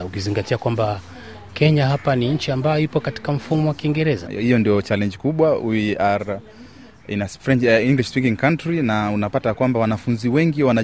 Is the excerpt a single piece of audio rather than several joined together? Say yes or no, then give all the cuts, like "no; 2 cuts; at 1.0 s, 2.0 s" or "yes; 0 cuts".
no; 1 cut; at 4.3 s